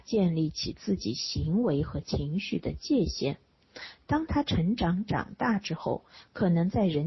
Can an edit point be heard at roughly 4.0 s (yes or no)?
no